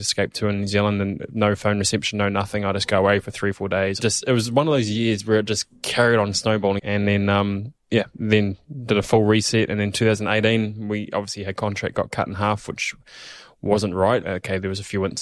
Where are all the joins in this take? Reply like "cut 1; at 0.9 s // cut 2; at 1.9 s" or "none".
cut 1; at 4.0 s // cut 2; at 6.8 s // cut 3; at 14.2 s